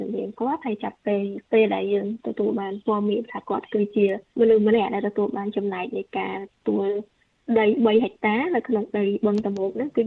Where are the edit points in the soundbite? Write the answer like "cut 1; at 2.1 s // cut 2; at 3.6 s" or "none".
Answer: cut 1; at 4.3 s // cut 2; at 6.6 s